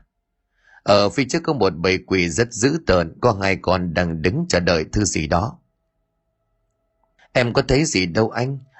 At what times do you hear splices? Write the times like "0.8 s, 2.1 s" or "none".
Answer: none